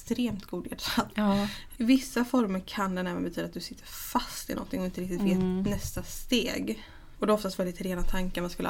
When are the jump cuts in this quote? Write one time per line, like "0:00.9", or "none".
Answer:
0:01.8
0:07.2